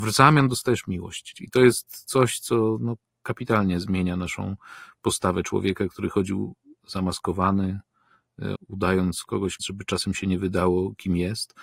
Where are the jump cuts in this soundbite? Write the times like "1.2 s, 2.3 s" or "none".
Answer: 1.3 s, 8.5 s, 9.6 s